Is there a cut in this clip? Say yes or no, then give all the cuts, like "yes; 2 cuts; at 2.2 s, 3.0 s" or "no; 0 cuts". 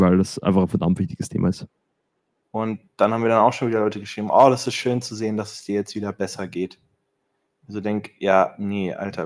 yes; 1 cut; at 2.4 s